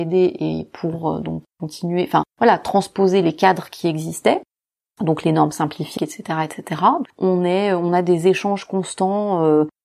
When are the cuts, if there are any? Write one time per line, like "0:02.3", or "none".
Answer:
0:06.0
0:07.0